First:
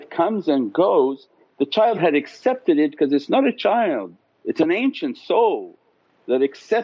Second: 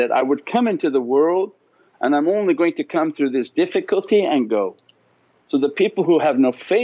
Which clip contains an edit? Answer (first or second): second